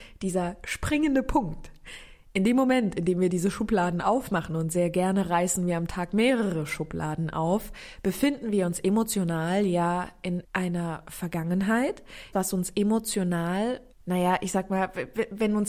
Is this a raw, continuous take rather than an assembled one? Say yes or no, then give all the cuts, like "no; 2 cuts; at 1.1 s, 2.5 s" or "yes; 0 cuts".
no; 3 cuts; at 10.4 s, 12.3 s, 13.9 s